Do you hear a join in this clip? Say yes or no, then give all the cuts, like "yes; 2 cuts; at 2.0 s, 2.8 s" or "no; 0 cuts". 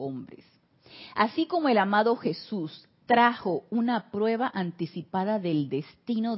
no; 0 cuts